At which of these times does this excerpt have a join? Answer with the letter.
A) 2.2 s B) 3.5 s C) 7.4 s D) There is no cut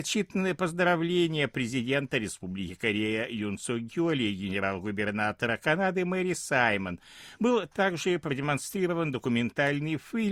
D